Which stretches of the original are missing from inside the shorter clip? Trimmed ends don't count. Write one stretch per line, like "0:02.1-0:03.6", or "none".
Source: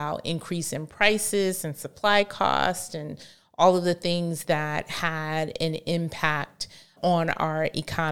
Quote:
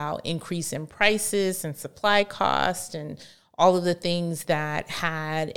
none

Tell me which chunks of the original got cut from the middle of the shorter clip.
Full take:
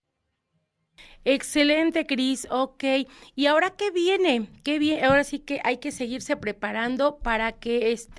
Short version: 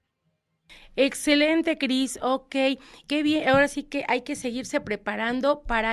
0:03.3-0:04.6

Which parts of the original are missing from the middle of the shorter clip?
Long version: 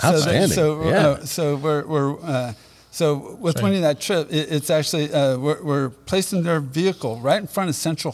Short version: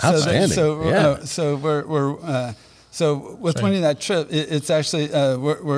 none

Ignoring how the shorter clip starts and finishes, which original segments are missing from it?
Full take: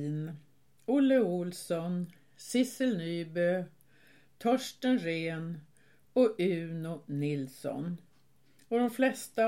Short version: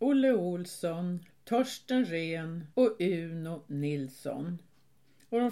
0:02.2-0:04.2
0:05.7-0:06.1

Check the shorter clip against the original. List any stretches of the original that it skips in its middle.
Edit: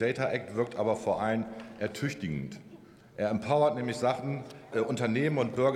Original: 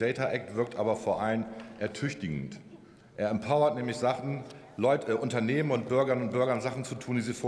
0:04.7-0:05.1

